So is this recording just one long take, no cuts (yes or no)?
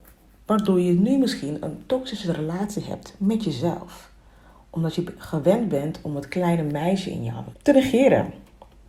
no